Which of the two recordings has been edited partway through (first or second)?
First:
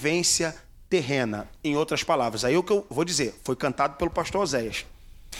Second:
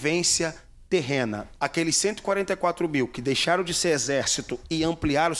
second